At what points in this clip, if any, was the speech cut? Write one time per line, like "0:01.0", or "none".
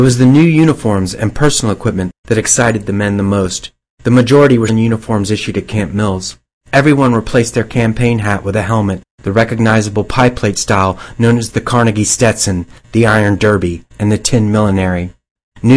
0:04.7